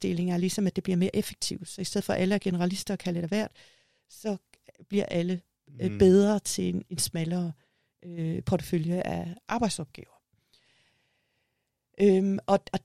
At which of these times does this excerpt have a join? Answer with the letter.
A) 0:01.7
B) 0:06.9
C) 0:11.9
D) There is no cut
B